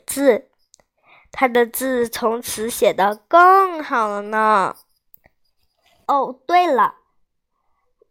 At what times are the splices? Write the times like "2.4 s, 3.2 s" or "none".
6.0 s